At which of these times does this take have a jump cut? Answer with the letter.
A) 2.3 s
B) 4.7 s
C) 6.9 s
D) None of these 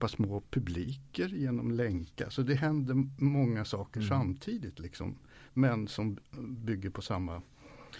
D